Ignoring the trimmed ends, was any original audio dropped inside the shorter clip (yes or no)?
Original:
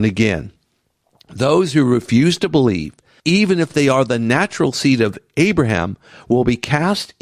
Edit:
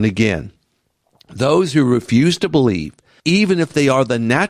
no